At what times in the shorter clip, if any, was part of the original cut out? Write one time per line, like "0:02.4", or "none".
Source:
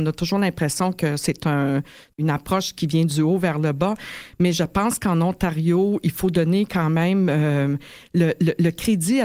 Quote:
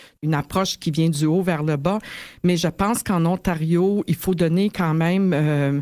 none

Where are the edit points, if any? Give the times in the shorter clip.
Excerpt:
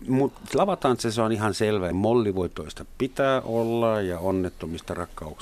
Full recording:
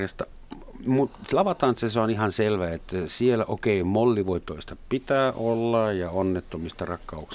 0:01.9

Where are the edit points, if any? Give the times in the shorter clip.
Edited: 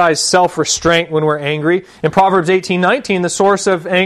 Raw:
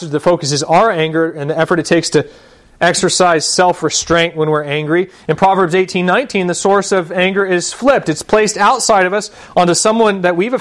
none

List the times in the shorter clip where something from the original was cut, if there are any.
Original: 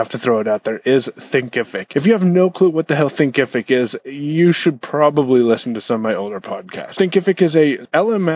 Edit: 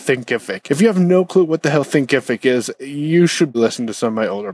0:03.5

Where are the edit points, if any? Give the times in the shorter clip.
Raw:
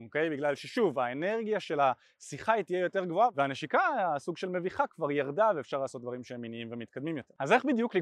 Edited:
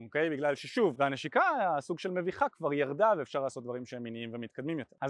0:00.9

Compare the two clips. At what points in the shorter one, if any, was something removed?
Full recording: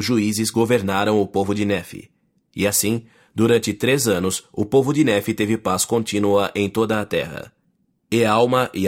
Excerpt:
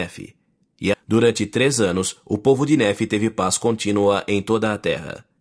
0:00.9

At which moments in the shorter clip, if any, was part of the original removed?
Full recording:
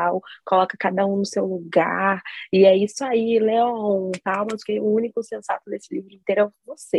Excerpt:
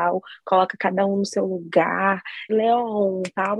0:02.5

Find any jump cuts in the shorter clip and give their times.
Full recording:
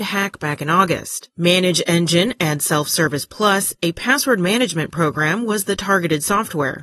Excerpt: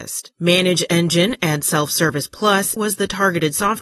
0:02.8

